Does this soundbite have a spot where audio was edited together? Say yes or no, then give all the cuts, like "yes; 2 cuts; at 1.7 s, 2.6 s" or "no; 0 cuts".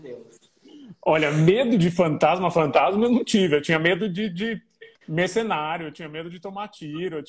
no; 0 cuts